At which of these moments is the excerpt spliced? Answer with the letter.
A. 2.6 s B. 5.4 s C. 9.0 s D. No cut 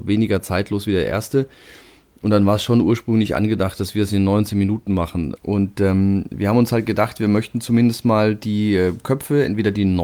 B